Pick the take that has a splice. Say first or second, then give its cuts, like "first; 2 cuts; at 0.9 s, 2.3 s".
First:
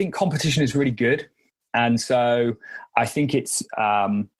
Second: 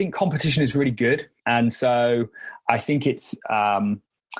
second; 1 cut; at 1.4 s